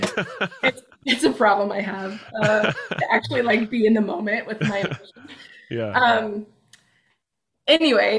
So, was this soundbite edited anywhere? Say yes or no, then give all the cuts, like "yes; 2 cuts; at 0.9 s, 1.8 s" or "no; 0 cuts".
no; 0 cuts